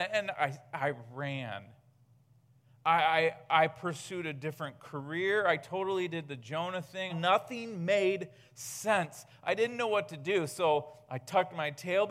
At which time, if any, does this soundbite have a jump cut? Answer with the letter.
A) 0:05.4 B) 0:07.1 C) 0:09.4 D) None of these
B